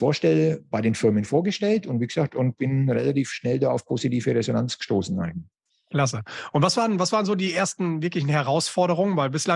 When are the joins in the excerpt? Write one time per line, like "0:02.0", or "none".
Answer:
none